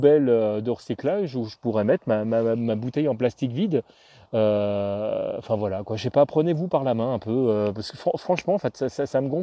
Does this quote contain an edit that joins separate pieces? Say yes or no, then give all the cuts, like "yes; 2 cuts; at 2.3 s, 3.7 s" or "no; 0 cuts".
no; 0 cuts